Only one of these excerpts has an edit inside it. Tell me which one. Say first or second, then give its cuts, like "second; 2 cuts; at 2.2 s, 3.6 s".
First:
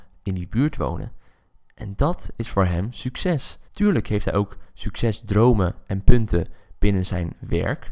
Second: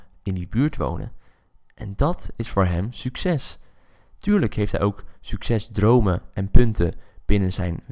first; 1 cut; at 3.7 s